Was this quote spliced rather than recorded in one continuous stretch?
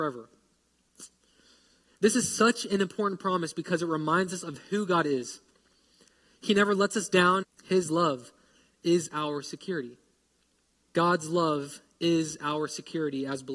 yes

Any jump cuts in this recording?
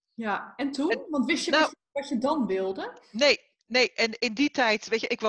no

